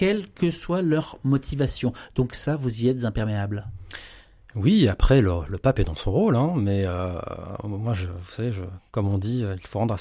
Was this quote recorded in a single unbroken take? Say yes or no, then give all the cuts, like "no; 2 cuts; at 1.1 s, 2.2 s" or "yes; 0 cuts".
yes; 0 cuts